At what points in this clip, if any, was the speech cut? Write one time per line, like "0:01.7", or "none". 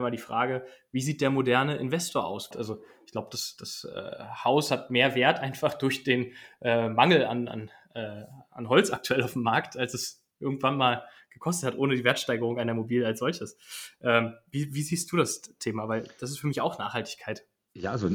0:02.5